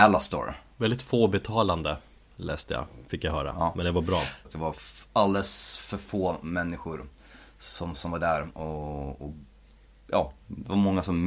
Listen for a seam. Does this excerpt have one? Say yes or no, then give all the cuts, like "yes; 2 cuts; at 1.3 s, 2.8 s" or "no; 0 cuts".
yes; 1 cut; at 4.4 s